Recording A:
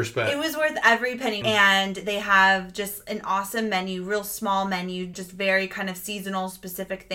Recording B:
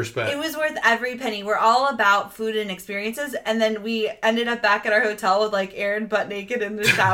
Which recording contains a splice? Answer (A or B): A